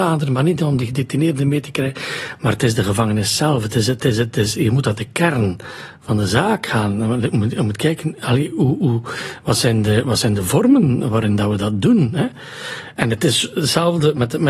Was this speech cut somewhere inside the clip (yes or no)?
no